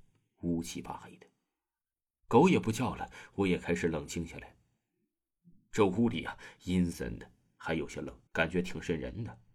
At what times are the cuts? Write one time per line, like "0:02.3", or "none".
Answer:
0:06.9
0:08.3